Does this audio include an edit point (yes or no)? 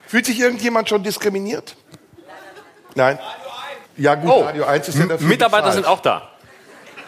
yes